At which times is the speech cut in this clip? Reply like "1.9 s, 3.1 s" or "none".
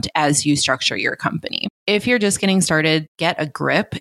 1.7 s, 3.1 s